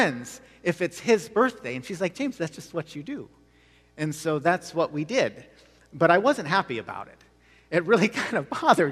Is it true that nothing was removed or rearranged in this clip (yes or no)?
yes